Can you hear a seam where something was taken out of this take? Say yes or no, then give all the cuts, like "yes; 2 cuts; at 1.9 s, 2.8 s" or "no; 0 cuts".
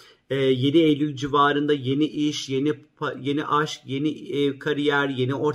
no; 0 cuts